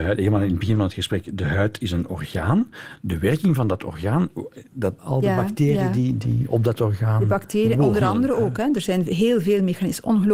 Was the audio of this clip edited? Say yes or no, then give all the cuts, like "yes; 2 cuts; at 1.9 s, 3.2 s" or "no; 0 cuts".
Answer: yes; 1 cut; at 5.0 s